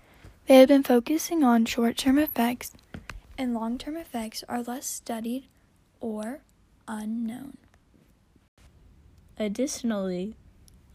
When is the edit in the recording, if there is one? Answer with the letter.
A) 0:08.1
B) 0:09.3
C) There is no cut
C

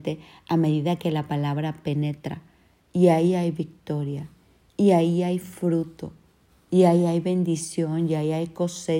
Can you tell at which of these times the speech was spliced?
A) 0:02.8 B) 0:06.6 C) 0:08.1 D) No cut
A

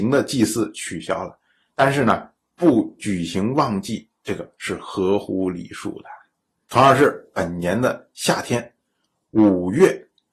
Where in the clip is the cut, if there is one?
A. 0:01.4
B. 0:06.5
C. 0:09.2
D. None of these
D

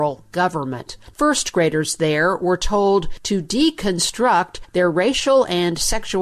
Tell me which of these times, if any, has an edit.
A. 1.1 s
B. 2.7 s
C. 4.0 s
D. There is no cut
A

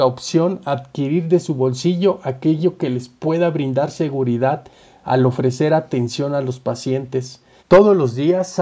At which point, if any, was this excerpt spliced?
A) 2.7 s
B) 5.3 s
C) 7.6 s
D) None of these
C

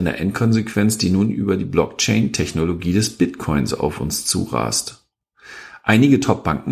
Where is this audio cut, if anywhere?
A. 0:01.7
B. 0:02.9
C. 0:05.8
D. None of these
D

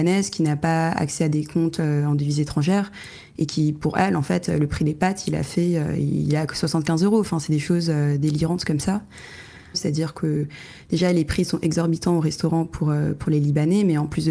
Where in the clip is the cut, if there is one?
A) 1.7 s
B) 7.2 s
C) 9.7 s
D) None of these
C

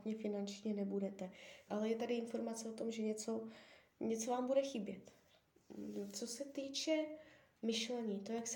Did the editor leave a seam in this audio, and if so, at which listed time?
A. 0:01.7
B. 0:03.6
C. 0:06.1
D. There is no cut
A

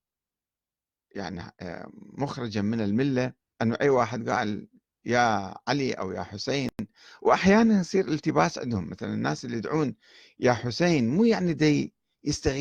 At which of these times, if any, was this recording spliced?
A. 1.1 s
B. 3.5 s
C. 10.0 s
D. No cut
B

